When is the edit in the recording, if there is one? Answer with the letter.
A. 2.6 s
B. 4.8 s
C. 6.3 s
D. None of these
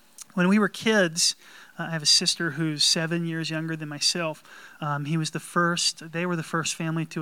B